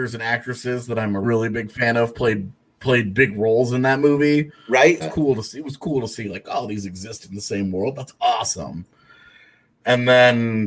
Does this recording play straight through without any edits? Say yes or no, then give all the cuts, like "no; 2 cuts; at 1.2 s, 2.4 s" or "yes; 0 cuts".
no; 2 cuts; at 1.2 s, 5.0 s